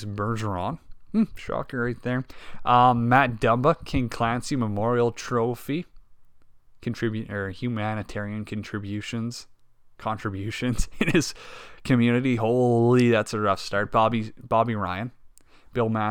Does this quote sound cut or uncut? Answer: uncut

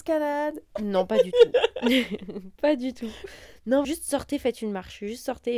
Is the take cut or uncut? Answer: cut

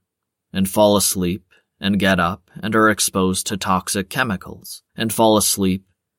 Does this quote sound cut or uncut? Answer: cut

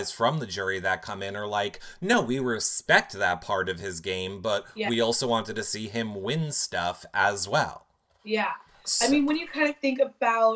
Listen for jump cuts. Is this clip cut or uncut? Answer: uncut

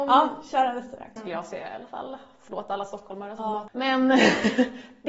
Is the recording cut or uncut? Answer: cut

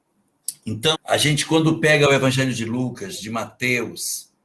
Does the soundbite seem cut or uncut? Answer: cut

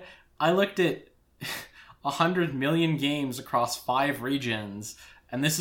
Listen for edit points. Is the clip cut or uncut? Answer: uncut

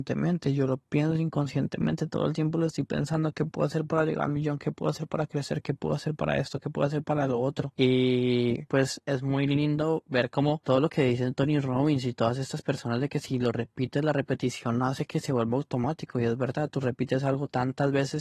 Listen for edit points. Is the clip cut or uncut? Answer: uncut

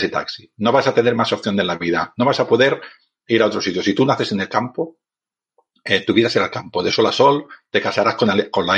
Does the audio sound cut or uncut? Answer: uncut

